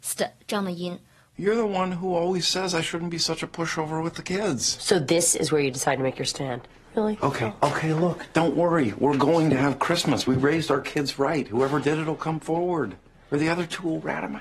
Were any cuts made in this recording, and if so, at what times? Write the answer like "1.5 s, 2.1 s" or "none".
none